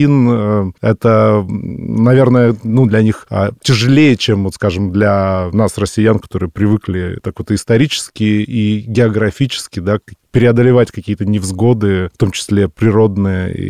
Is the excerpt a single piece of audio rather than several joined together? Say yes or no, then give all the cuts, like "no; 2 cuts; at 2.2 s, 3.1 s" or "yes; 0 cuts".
yes; 0 cuts